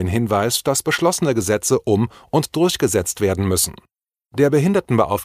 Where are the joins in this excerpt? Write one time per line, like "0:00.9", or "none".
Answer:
none

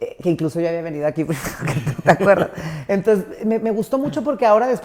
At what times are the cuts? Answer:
none

